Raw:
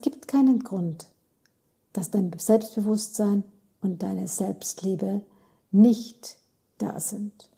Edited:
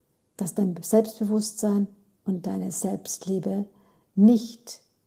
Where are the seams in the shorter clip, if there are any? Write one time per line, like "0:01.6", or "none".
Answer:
none